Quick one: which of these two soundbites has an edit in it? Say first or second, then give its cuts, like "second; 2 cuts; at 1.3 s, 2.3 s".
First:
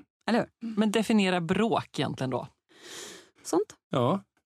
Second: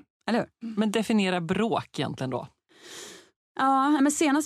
first; 1 cut; at 3.4 s